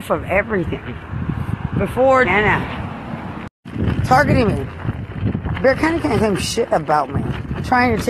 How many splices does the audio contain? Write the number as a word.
one